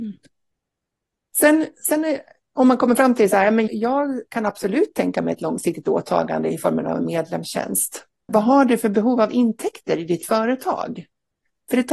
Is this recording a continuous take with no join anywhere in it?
no; 2 cuts; at 3.7 s, 8.3 s

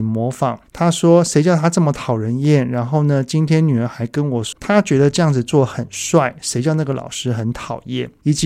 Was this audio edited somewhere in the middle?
yes; 1 cut; at 4.5 s

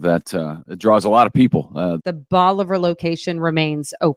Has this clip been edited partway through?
yes; 1 cut; at 2.0 s

